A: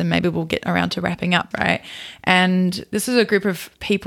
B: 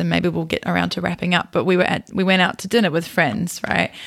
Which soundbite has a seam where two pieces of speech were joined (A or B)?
A